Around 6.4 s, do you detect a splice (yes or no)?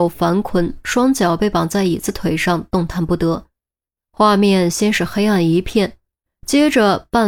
no